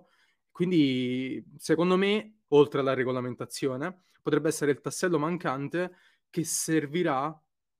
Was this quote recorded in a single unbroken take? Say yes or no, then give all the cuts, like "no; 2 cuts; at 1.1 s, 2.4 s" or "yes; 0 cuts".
no; 1 cut; at 2.5 s